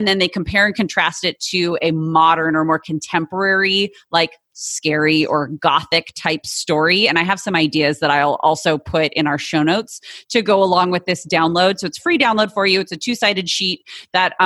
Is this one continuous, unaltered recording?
yes; 0 cuts

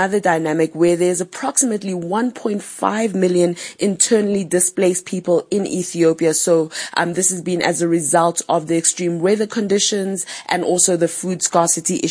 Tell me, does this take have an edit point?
no; 0 cuts

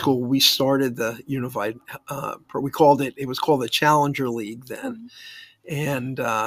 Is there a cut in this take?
no; 0 cuts

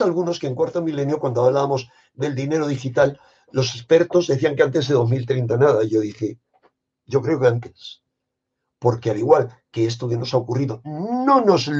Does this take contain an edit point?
no; 0 cuts

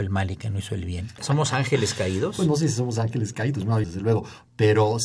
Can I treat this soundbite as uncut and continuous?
no; 2 cuts; at 1.2 s, 3.8 s

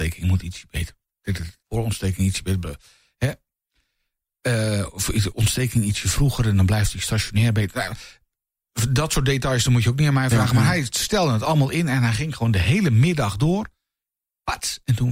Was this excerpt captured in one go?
no; 1 cut; at 1.6 s

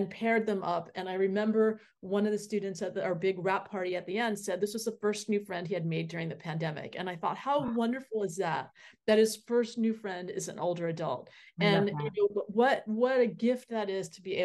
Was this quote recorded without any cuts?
yes; 0 cuts

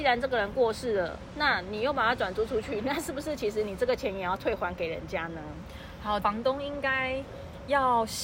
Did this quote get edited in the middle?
yes; 1 cut; at 6.2 s

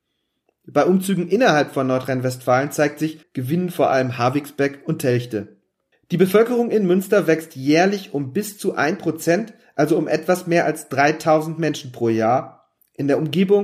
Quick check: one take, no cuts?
no; 2 cuts; at 3.2 s, 5.9 s

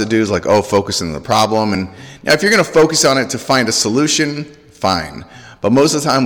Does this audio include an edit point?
no; 0 cuts

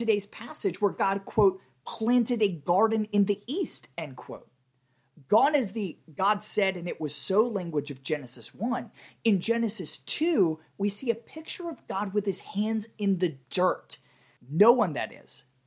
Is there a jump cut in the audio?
yes; 1 cut; at 14.4 s

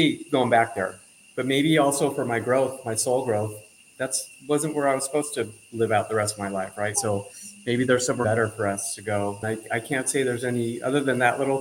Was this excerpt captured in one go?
no; 3 cuts; at 6.9 s, 8.2 s, 9.4 s

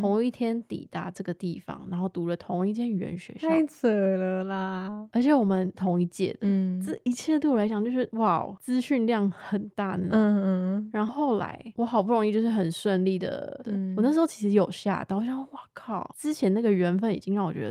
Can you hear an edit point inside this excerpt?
yes; 2 cuts; at 11.1 s, 13.6 s

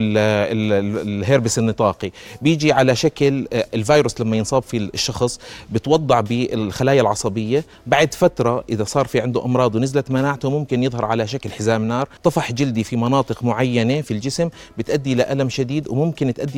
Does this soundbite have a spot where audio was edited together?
yes; 1 cut; at 12.2 s

